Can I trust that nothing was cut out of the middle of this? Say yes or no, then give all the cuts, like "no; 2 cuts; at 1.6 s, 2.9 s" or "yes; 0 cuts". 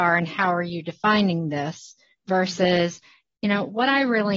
yes; 0 cuts